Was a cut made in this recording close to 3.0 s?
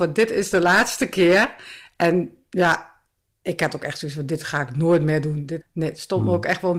no; 1 cut; at 5.6 s

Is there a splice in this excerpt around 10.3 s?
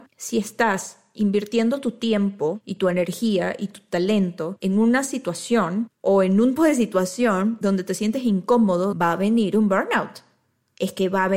no; 2 cuts; at 6.6 s, 8.9 s

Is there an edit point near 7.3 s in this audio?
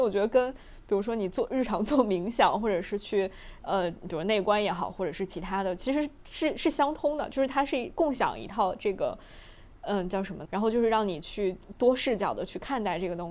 no; 1 cut; at 10.5 s

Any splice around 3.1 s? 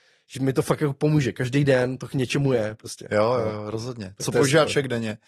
no; 0 cuts

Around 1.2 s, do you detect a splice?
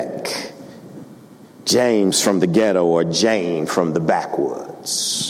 no; 0 cuts

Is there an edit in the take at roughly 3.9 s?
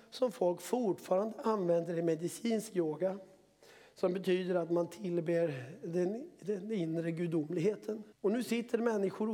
no; 1 cut; at 8.1 s

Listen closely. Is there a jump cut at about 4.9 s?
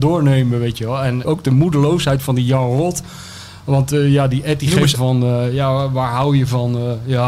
yes; 2 cuts; at 1.2 s, 4.9 s

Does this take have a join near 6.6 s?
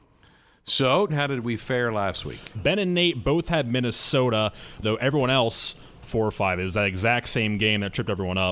no; 3 cuts; at 1.1 s, 2.5 s, 4.8 s

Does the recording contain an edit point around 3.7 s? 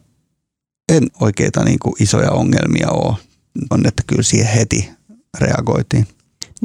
yes; 2 cuts; at 1.1 s, 3.7 s

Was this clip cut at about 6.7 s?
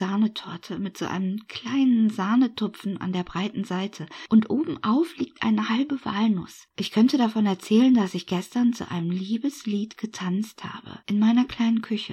yes; 1 cut; at 6.7 s

